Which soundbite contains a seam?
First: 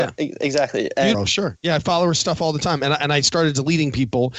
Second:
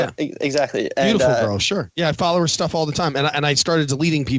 first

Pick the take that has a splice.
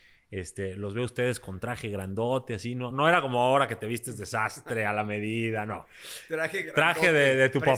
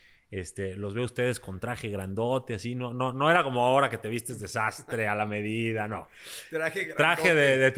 first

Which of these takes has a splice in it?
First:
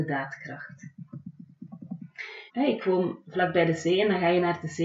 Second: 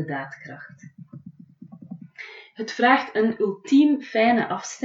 first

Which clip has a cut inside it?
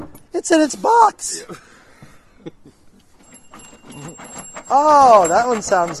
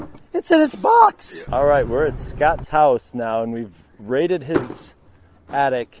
second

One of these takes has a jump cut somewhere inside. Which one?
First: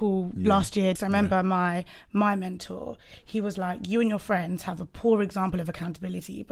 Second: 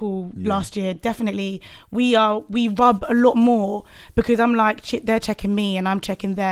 first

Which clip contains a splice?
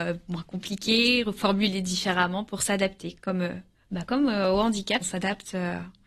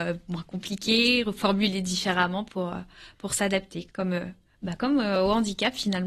first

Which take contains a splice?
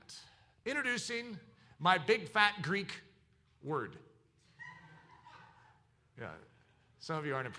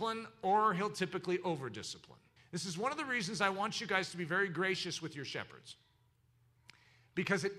second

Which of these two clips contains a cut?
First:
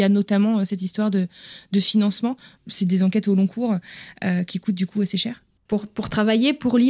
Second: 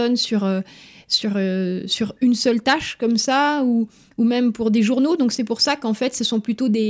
first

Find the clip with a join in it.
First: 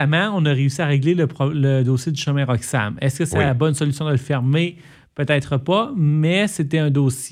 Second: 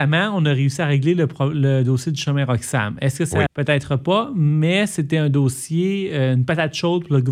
second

